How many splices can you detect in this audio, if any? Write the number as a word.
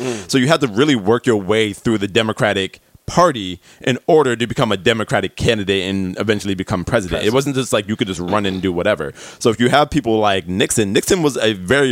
zero